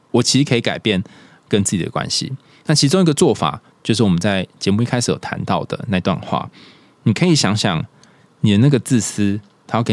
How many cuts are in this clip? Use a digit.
0